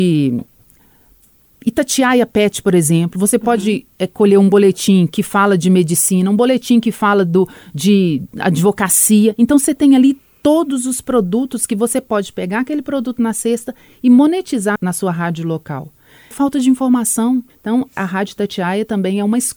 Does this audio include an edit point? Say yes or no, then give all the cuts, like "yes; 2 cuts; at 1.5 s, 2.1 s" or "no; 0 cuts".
yes; 3 cuts; at 14.8 s, 16.3 s, 17.5 s